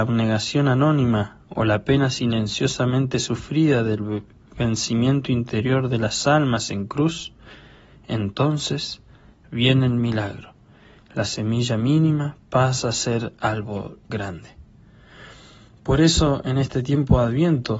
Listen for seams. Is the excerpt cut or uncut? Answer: cut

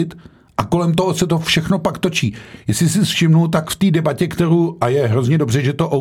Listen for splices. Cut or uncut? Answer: uncut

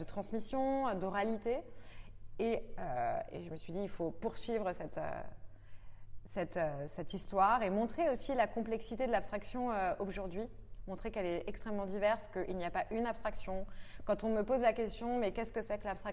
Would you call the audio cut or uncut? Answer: uncut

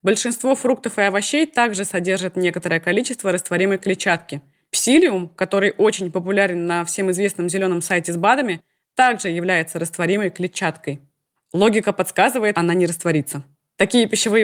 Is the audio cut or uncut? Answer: cut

